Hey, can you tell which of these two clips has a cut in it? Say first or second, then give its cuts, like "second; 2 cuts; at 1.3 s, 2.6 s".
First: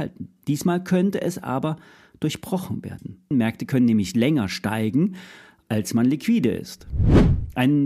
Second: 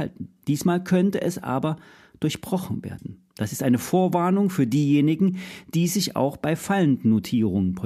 first; 1 cut; at 3.3 s